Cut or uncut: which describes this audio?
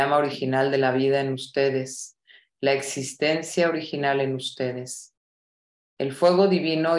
cut